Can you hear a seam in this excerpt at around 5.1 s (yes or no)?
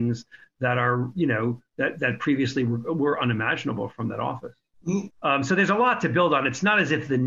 yes